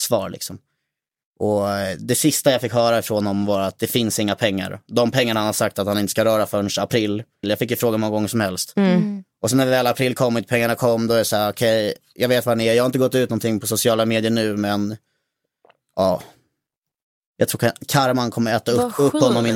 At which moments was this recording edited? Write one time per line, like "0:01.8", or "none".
0:07.4